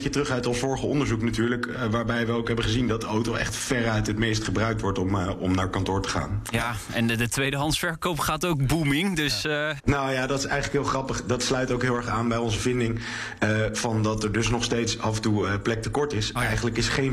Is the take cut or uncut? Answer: cut